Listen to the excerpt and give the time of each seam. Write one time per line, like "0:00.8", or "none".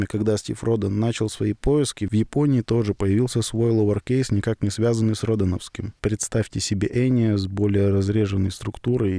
0:06.0